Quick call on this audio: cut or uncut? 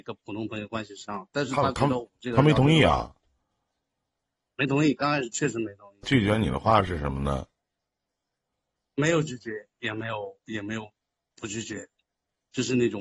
cut